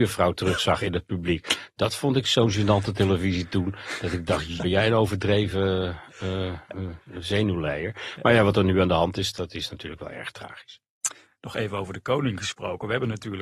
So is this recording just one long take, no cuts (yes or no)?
no